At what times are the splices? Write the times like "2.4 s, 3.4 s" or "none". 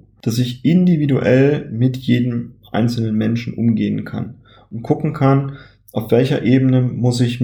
none